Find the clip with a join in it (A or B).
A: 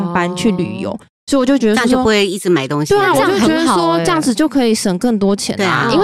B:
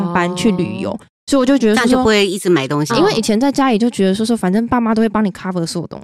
B